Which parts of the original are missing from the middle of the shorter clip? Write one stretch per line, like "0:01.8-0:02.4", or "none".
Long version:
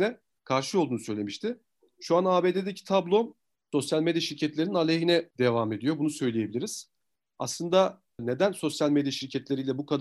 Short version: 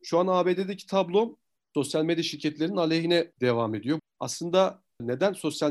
0:06.0-0:07.2